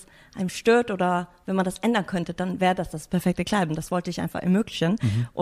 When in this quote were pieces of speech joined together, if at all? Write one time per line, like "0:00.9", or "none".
none